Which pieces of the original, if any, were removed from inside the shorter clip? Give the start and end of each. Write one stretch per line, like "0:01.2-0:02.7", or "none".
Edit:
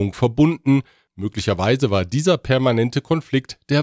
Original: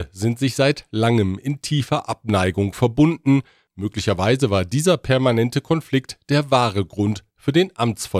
none